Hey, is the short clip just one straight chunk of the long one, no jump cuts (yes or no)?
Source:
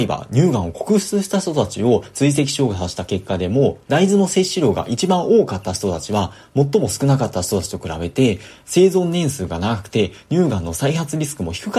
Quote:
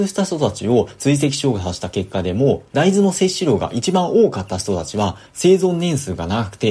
no